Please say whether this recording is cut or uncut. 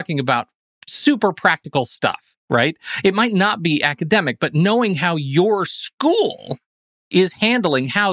uncut